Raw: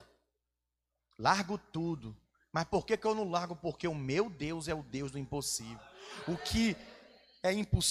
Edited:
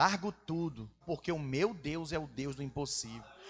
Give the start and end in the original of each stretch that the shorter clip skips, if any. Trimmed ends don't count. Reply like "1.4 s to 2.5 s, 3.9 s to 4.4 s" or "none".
2.3 s to 3.6 s